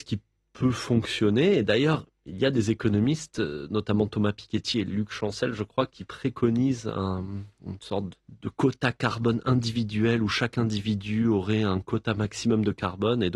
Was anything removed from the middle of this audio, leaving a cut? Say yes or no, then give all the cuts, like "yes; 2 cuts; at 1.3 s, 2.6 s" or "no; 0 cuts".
yes; 1 cut; at 8.1 s